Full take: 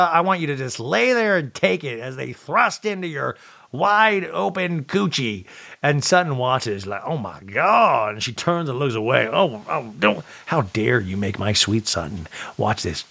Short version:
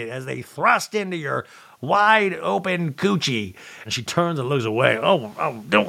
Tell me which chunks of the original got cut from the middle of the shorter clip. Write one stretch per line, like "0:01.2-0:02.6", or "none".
0:05.8-0:08.1